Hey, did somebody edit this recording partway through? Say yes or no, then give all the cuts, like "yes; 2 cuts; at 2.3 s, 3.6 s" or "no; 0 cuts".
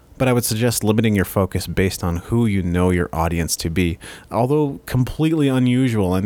no; 0 cuts